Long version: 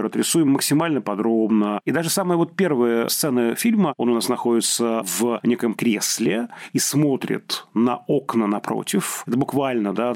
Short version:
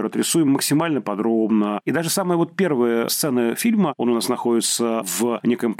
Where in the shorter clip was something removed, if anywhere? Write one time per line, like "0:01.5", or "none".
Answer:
none

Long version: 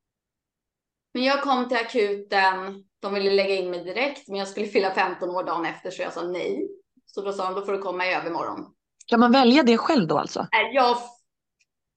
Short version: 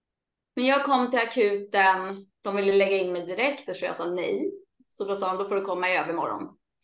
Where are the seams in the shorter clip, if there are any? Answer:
0:03.7

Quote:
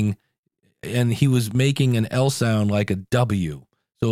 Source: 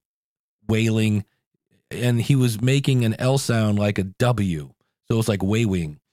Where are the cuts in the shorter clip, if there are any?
none

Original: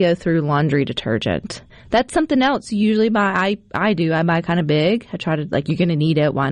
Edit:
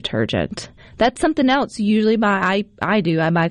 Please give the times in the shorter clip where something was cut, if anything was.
none

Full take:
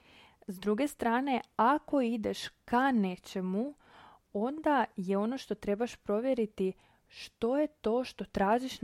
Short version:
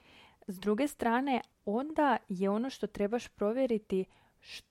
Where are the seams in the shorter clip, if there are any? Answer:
0:01.5

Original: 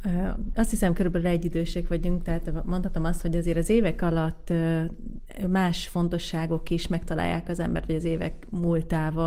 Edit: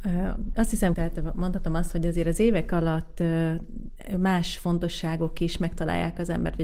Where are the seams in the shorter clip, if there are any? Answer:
0:00.9

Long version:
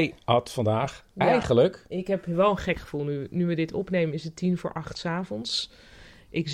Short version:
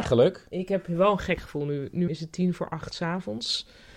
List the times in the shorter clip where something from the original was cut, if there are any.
0:02.1

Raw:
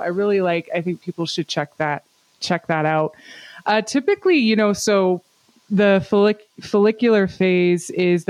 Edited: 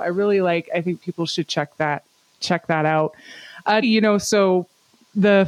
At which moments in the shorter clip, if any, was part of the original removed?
0:03.8

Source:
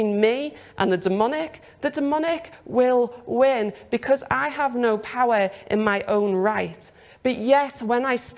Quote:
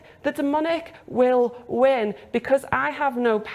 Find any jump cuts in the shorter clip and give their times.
none

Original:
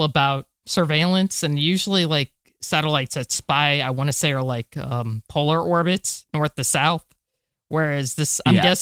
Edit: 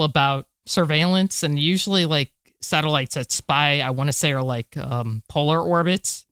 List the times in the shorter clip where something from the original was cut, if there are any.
none

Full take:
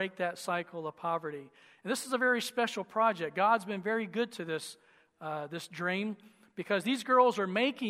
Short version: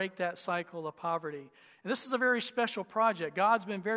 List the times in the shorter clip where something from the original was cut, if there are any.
none

